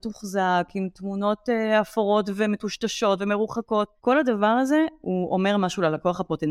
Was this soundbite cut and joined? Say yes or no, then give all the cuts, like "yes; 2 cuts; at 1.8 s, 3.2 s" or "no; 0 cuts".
yes; 1 cut; at 4.0 s